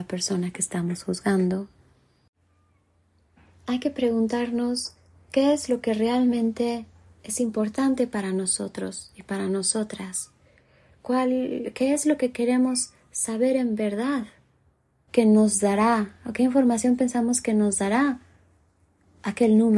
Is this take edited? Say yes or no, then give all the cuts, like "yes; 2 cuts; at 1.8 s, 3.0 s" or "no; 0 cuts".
yes; 1 cut; at 15.1 s